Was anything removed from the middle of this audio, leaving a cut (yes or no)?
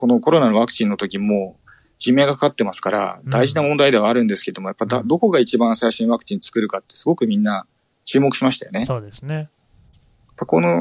no